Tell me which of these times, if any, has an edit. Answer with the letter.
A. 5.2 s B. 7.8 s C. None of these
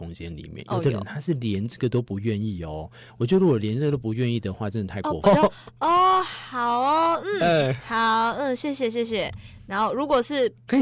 A